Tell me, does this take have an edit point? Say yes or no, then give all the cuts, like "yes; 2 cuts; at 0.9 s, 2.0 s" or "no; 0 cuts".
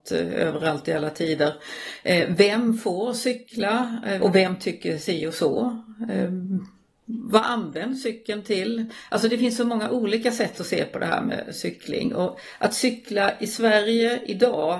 yes; 1 cut; at 4.2 s